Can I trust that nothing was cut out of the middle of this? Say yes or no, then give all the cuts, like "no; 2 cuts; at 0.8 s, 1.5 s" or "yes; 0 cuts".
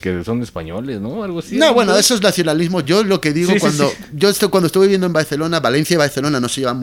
yes; 0 cuts